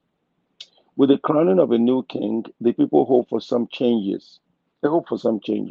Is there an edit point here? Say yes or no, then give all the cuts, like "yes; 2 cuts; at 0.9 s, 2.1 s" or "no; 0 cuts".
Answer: no; 0 cuts